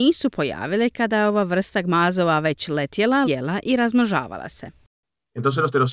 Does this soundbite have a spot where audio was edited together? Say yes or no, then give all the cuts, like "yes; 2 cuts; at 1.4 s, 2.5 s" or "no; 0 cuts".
yes; 1 cut; at 3.2 s